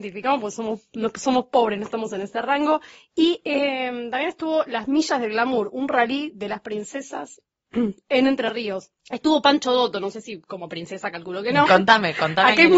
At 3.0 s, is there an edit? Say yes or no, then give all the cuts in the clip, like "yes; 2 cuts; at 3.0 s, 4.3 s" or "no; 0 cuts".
no; 2 cuts; at 9.0 s, 11.7 s